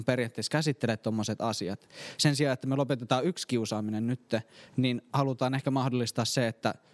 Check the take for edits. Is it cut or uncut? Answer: uncut